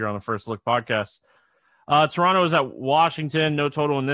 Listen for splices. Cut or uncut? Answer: uncut